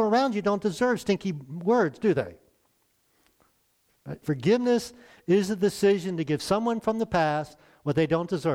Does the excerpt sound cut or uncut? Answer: cut